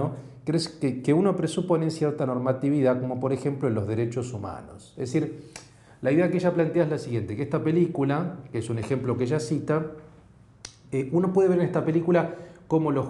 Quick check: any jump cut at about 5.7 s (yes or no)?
no